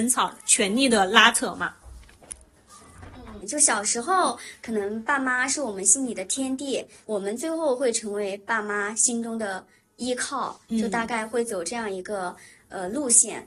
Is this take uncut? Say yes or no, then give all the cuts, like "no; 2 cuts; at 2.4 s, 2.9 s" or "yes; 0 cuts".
no; 2 cuts; at 3.4 s, 7.0 s